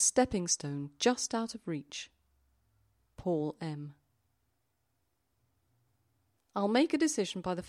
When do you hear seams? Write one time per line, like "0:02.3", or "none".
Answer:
0:06.4